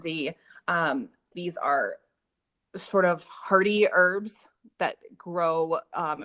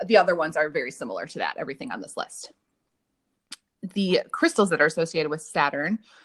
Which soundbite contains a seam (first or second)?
first